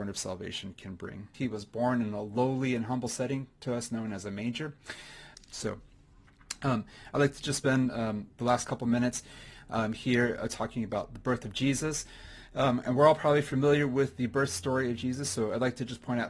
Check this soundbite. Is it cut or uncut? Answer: cut